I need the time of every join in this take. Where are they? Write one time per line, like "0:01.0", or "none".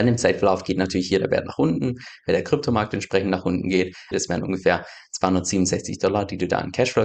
0:04.1